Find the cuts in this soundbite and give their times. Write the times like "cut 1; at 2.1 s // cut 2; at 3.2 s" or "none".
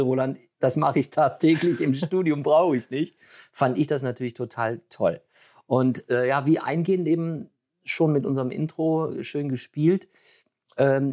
none